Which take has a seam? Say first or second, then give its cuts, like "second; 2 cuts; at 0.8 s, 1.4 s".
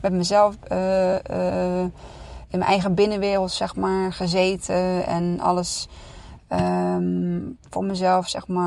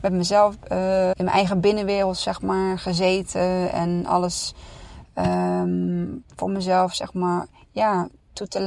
second; 1 cut; at 1.1 s